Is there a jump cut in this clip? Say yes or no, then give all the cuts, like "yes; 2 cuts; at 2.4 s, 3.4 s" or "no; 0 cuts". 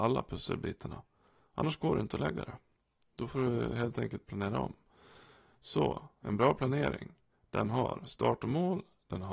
no; 0 cuts